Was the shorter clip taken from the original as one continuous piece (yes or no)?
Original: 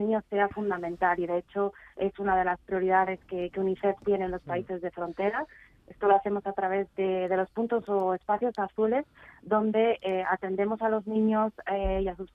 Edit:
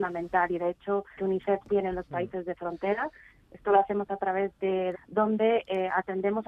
no